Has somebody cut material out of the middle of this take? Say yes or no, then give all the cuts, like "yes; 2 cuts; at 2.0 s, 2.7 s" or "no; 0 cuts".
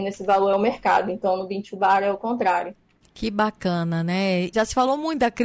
yes; 2 cuts; at 3.0 s, 4.5 s